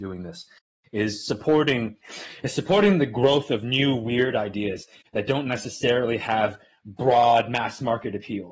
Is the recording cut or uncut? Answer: uncut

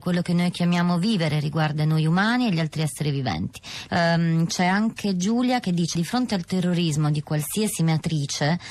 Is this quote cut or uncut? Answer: cut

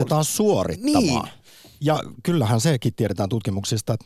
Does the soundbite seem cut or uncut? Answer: uncut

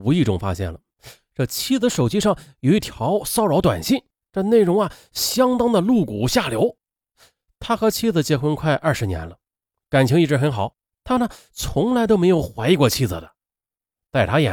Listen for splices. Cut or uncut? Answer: uncut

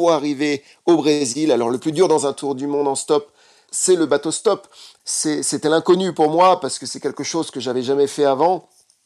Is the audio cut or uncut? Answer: uncut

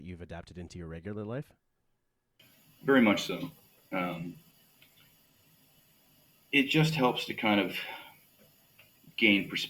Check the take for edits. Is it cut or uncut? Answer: uncut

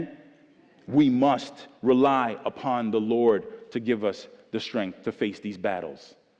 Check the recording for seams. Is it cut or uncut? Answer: uncut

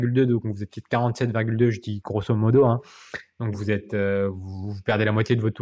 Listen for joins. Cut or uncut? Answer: cut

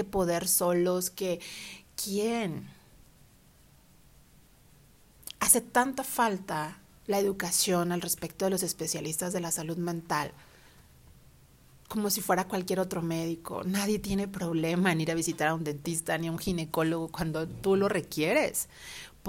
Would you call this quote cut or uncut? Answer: uncut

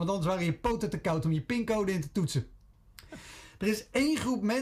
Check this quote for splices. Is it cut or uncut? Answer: uncut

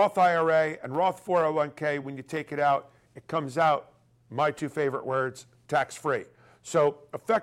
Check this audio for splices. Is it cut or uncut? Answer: uncut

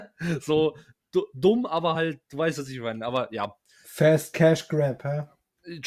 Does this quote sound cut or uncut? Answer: uncut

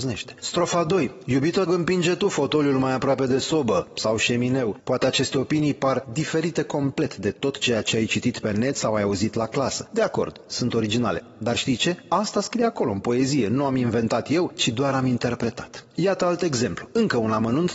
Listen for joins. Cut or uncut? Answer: cut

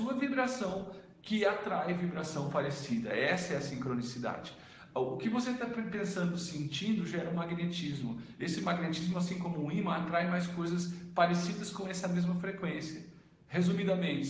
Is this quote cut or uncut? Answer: uncut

